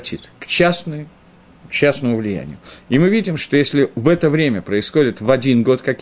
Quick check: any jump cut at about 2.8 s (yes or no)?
yes